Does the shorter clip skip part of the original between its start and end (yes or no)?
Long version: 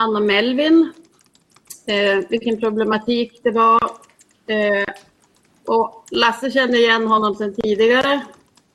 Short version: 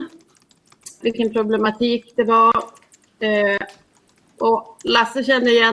yes